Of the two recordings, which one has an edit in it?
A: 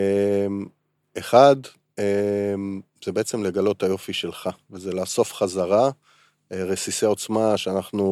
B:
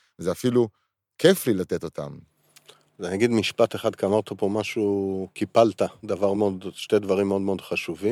B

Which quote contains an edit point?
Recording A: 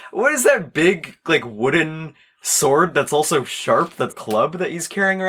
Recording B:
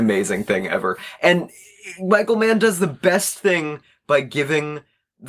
A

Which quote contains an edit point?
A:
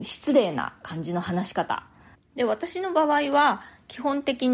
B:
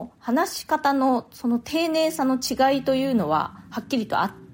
A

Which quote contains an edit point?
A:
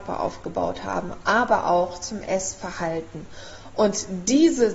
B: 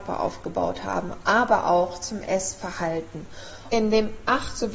B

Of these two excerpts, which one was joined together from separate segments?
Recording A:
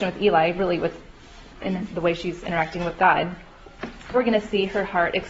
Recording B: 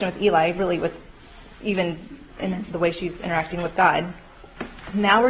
A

